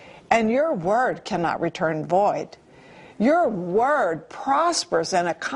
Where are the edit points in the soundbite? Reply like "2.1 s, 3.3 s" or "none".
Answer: none